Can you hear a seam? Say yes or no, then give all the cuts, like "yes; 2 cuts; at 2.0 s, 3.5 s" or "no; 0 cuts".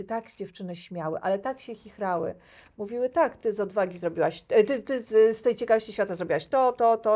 no; 0 cuts